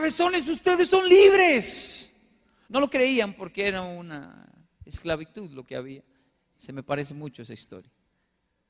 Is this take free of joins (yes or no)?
no